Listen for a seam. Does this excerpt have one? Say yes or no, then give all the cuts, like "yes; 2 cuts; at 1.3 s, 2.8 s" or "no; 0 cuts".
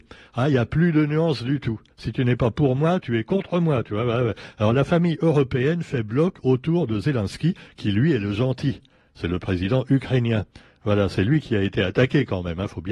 yes; 1 cut; at 1.9 s